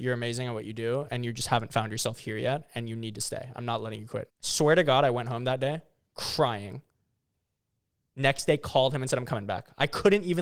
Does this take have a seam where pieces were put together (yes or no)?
yes